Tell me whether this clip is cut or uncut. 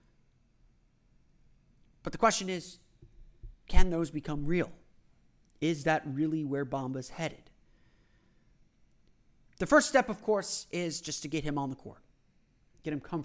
uncut